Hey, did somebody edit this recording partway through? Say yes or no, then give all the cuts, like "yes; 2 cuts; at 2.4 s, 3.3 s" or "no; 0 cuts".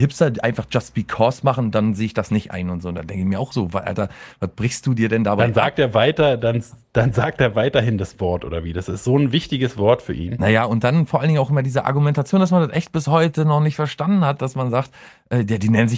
no; 0 cuts